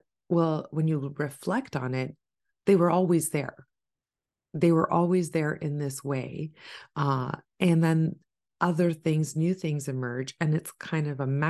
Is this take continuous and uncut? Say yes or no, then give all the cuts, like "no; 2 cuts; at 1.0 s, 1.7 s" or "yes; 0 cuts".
yes; 0 cuts